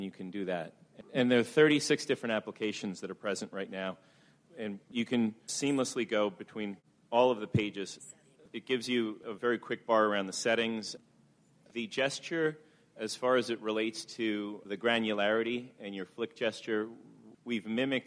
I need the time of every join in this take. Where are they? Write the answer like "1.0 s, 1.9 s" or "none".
none